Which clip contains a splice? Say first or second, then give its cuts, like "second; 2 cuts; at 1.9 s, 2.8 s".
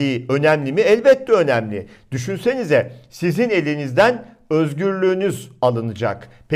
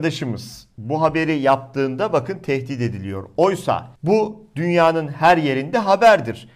second; 1 cut; at 3.9 s